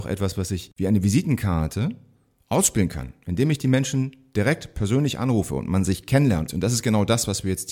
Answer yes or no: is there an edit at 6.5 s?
yes